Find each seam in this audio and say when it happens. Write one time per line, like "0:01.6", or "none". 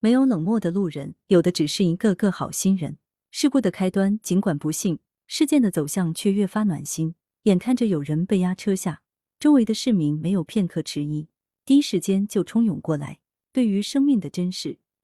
none